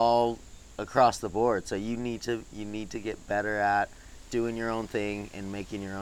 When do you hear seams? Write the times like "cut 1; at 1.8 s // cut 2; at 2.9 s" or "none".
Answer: cut 1; at 4.2 s